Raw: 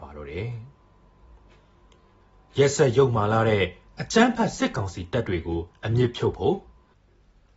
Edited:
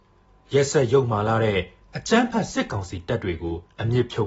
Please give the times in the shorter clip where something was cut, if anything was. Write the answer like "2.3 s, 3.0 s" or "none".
none